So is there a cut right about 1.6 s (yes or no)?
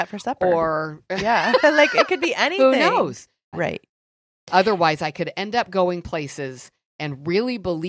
no